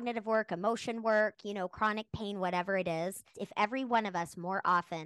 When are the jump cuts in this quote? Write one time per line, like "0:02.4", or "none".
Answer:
0:03.3

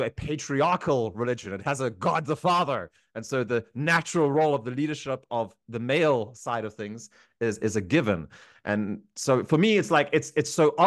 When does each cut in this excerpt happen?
none

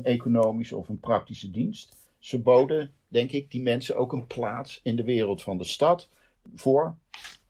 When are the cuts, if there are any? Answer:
none

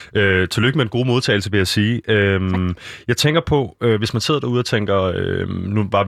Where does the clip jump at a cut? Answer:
none

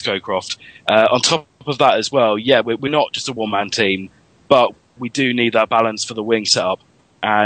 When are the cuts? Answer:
none

